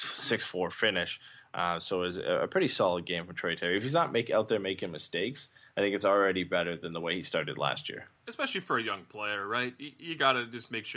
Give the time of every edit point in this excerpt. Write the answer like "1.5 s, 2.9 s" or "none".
8.2 s